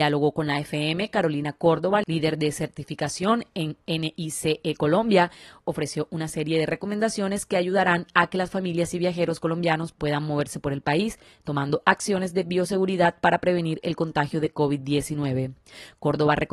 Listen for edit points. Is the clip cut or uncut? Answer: uncut